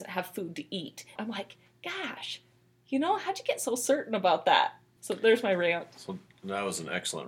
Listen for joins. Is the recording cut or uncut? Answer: cut